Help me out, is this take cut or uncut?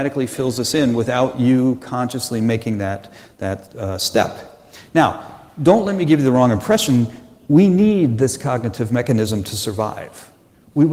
uncut